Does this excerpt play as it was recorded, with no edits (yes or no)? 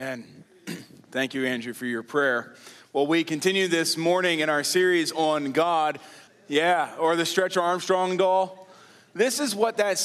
no